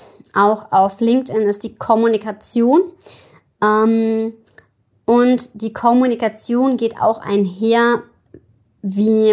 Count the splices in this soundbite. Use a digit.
0